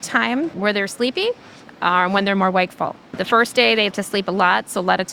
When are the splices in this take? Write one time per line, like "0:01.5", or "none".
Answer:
0:03.9